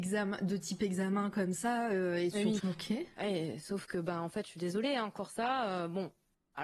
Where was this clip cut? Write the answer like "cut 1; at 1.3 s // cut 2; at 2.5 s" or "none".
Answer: cut 1; at 2.6 s